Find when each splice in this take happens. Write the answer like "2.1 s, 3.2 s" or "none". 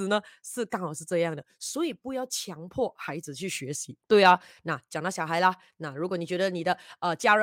4.0 s